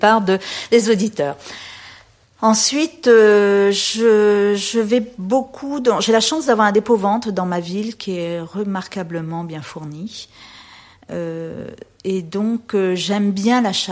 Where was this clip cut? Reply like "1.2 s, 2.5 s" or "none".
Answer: none